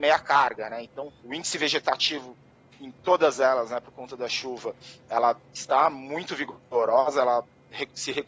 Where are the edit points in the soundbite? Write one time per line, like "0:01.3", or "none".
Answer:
0:01.2